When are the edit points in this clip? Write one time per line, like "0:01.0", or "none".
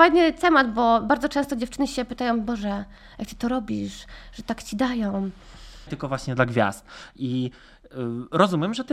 0:05.9